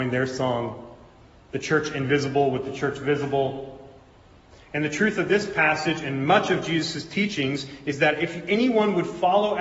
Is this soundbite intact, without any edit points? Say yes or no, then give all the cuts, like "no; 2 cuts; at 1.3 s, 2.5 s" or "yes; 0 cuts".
no; 1 cut; at 4.5 s